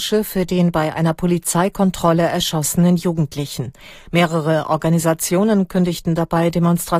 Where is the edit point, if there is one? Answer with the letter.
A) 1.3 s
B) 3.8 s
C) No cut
C